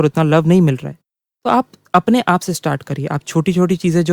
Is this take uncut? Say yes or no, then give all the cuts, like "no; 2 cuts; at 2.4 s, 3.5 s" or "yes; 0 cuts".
yes; 0 cuts